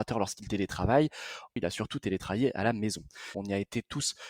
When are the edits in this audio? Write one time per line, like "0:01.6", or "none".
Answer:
0:01.6
0:03.3